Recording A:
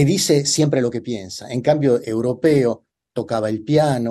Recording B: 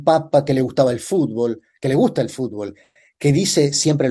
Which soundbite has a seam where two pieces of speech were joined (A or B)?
A